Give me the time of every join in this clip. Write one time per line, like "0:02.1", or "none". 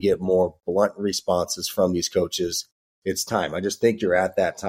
none